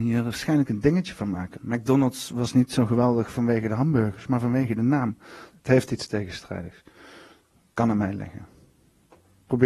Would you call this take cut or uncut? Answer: cut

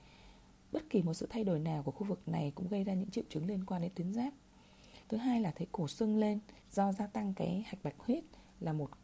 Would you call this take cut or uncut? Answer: cut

